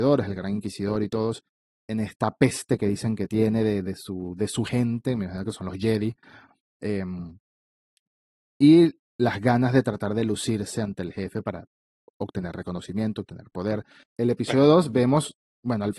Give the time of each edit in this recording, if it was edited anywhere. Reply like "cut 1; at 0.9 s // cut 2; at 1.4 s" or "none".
cut 1; at 14.0 s